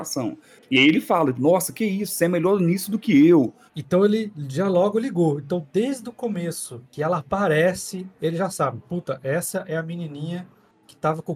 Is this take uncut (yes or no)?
no